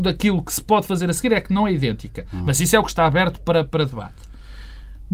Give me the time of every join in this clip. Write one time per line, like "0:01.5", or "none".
none